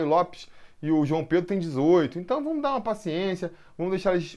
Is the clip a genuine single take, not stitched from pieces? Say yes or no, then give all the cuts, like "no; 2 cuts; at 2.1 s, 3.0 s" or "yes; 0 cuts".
yes; 0 cuts